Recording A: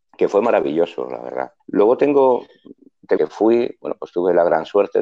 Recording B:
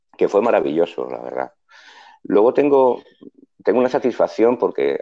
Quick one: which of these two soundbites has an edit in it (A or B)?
A